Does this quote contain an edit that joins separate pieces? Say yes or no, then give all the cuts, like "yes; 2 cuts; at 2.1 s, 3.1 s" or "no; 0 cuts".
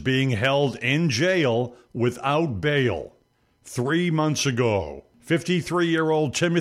no; 0 cuts